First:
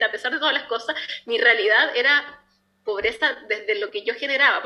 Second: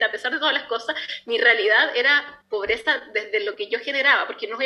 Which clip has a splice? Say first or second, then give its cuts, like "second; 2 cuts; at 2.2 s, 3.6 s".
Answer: second; 1 cut; at 2.4 s